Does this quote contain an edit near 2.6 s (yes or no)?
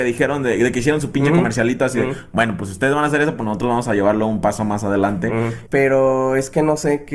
no